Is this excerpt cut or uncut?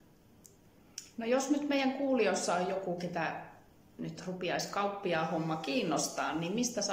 cut